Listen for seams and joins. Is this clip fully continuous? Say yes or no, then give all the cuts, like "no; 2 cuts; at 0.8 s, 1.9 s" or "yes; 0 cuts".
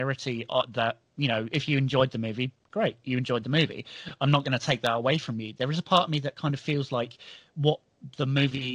yes; 0 cuts